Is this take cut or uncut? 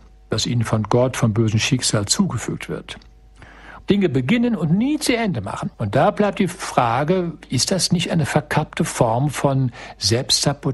cut